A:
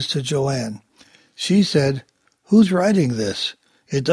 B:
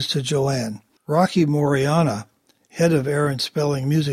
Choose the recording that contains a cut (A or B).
B